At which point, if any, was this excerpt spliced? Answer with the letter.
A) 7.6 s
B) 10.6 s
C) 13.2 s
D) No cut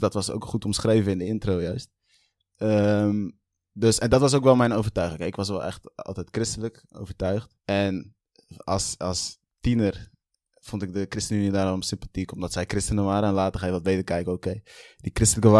A